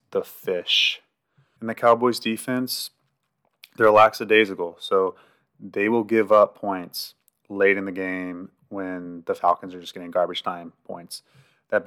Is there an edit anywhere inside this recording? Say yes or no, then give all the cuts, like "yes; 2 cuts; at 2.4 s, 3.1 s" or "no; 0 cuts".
yes; 1 cut; at 1.6 s